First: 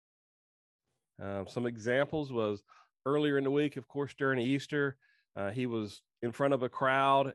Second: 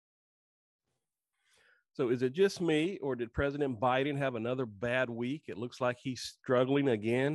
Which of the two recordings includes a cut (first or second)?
first